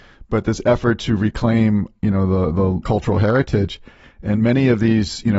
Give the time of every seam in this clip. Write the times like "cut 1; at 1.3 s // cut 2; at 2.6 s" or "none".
cut 1; at 2.8 s